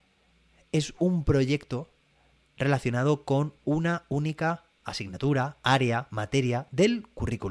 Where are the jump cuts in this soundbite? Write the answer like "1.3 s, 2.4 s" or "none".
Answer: none